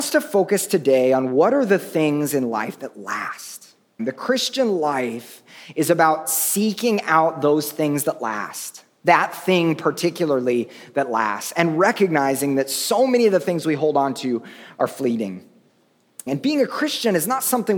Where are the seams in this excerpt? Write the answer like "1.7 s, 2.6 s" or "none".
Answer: 4.0 s, 16.3 s